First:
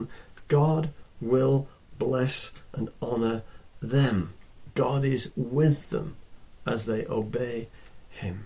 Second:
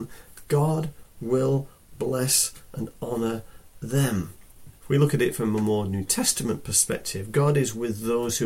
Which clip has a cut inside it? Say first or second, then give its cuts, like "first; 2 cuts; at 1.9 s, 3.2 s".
second; 1 cut; at 4.7 s